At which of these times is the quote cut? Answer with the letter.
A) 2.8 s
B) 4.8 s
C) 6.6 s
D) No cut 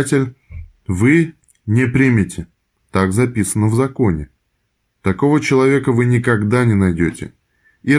A